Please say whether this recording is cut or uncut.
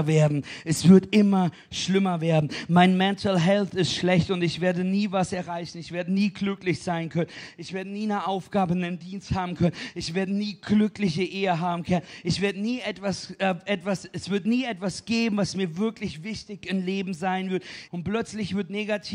cut